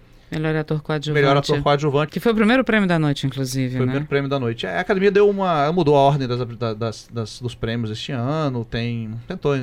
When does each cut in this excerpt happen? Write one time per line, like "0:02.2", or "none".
0:02.1